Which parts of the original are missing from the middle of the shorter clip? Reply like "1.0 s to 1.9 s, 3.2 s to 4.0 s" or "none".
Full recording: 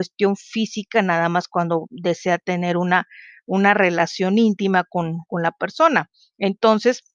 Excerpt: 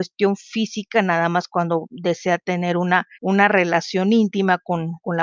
3.1 s to 3.4 s